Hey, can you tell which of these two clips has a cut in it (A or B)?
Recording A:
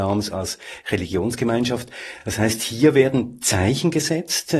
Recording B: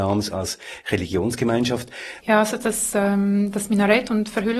B